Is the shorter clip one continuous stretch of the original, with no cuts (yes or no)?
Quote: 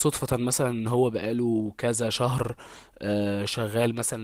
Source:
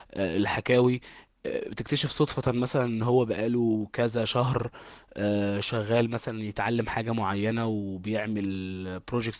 yes